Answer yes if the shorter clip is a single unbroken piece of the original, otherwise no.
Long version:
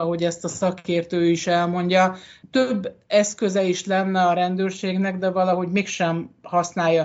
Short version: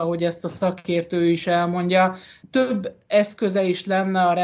yes